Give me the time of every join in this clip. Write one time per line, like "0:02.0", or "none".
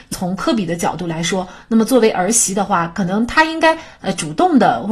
none